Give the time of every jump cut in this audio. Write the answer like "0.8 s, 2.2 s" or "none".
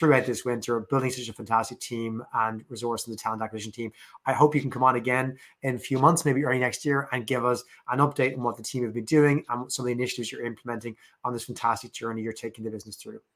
none